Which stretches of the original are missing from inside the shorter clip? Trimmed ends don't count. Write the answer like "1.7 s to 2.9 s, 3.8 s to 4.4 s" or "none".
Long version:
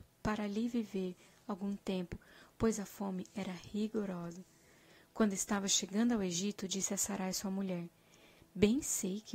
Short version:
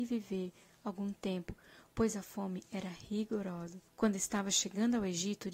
4.5 s to 5.0 s